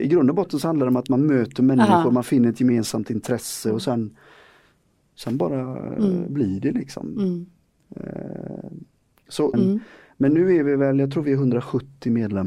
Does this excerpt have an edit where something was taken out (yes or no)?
yes